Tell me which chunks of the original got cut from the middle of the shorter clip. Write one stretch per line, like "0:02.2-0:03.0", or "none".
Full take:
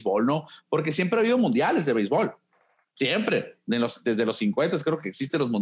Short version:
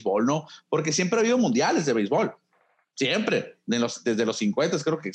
none